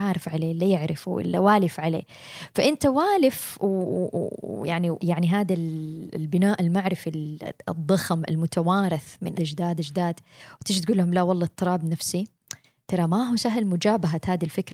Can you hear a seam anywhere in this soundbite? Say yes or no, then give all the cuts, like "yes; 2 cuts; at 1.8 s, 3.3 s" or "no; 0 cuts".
yes; 2 cuts; at 5.0 s, 9.4 s